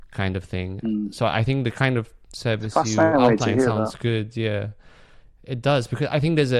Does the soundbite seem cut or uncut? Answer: uncut